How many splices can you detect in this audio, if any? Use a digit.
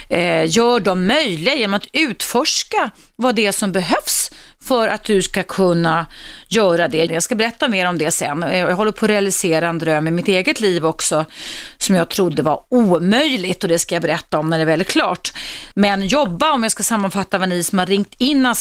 2